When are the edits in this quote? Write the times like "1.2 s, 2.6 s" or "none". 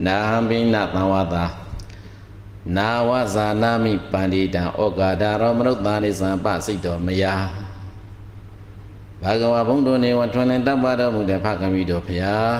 6.0 s